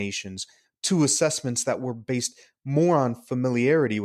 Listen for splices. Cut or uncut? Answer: uncut